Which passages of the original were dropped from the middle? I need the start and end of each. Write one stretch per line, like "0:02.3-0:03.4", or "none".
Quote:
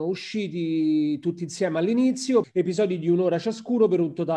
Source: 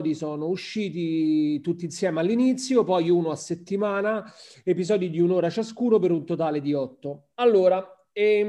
0:02.9-0:04.5